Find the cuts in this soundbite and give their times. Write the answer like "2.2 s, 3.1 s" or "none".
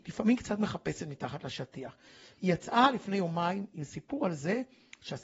none